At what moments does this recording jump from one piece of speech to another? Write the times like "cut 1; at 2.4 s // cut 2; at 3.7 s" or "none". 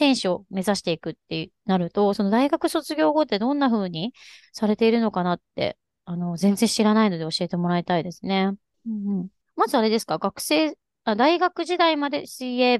cut 1; at 8.7 s